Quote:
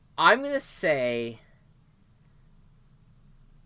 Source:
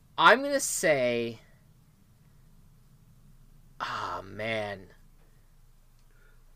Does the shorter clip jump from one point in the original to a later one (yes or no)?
no